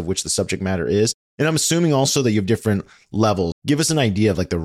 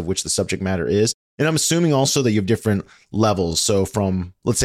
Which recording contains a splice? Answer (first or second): first